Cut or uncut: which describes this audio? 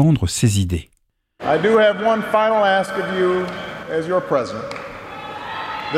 cut